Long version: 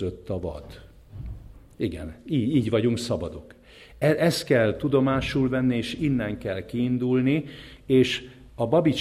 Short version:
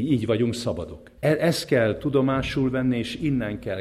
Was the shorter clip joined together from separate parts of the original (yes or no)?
yes